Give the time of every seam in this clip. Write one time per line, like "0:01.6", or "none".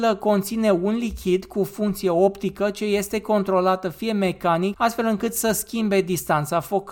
0:04.7